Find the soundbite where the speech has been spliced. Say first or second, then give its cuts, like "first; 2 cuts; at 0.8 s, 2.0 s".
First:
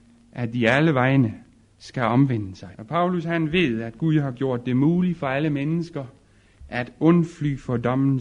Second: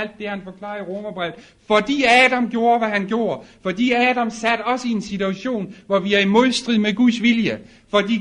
first; 1 cut; at 2.7 s